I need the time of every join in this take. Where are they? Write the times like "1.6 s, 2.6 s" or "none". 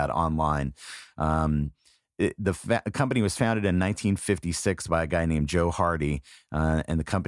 none